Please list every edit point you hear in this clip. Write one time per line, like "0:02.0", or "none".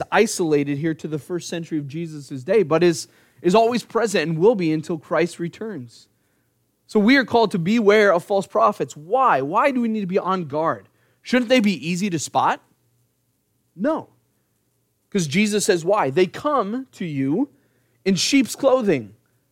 none